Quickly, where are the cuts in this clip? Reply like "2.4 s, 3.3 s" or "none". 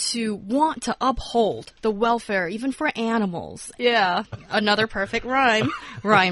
3.8 s